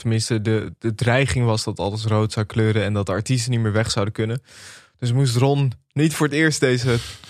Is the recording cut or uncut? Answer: uncut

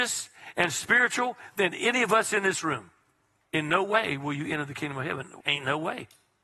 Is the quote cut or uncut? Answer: cut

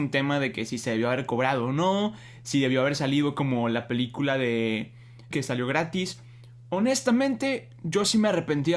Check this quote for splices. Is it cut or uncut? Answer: cut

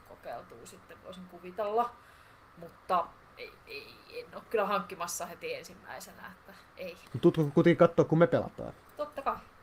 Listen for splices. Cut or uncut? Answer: cut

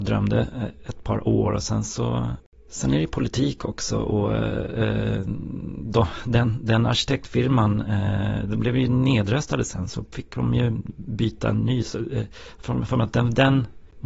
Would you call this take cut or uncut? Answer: uncut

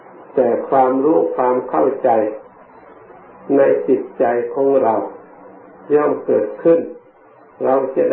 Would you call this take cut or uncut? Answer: uncut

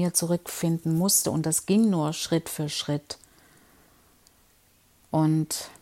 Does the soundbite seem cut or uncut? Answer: uncut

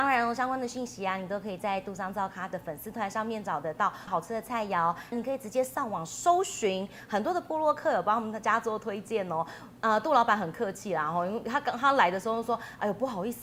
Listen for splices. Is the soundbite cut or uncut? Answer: cut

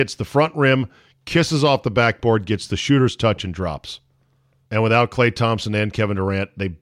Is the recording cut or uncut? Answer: cut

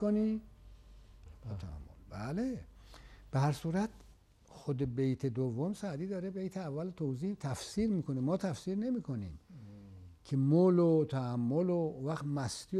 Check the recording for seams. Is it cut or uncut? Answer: cut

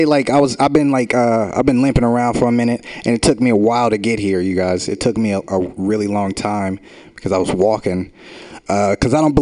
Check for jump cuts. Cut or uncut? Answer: uncut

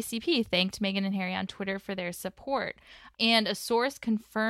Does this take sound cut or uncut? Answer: cut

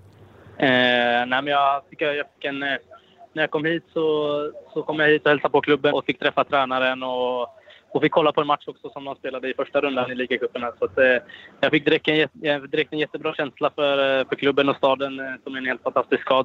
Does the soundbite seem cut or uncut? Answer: cut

